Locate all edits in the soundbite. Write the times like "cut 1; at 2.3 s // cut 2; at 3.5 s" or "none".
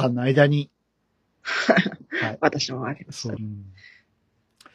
cut 1; at 3.4 s